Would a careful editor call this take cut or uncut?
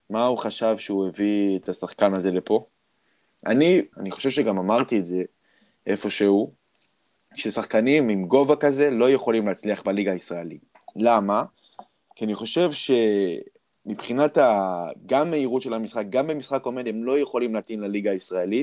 cut